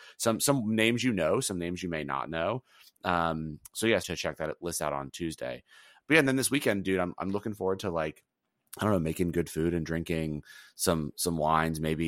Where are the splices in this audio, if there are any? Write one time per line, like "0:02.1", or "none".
0:04.0